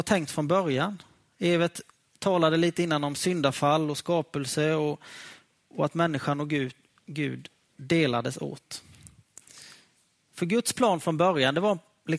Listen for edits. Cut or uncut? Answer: uncut